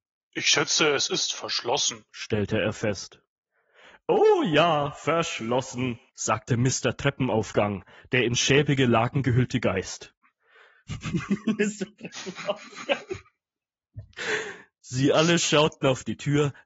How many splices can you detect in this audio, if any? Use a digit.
0